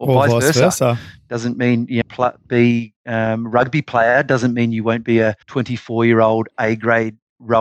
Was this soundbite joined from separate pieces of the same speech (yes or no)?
yes